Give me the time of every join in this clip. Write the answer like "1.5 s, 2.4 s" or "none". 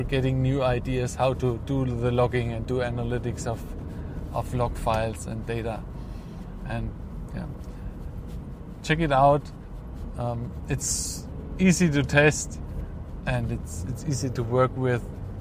none